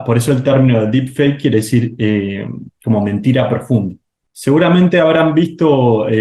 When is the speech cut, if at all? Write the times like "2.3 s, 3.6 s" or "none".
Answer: 4.2 s